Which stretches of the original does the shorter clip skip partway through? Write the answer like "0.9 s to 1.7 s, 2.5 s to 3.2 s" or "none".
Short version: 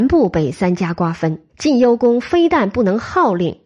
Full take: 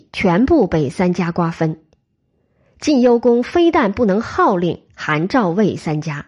1.9 s to 2.7 s

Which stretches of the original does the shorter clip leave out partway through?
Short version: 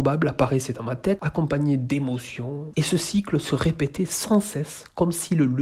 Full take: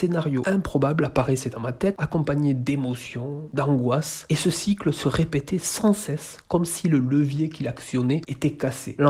3.5 s to 4.3 s

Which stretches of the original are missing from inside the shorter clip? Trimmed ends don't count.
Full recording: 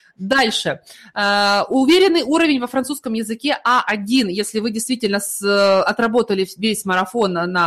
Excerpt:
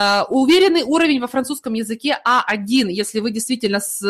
none

